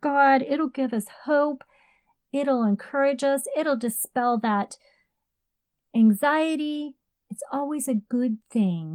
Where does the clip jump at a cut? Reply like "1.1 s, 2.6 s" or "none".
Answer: none